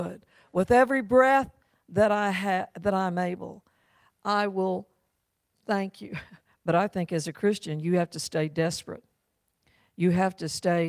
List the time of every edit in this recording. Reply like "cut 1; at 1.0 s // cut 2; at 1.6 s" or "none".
cut 1; at 6.5 s